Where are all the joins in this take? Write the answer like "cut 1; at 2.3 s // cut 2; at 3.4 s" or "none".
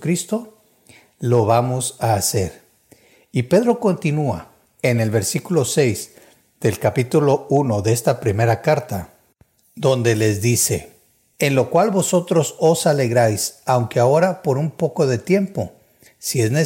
none